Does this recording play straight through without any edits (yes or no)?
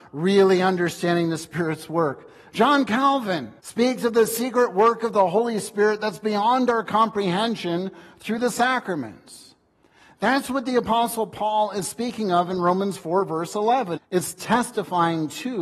no